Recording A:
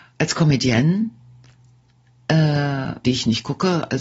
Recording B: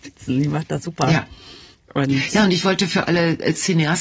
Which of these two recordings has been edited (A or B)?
A